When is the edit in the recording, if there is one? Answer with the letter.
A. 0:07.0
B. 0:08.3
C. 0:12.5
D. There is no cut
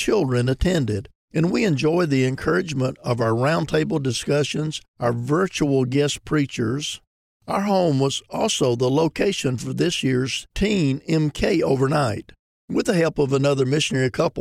C